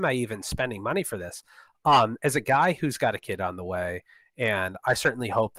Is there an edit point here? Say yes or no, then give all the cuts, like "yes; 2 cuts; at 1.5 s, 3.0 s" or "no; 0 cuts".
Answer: no; 0 cuts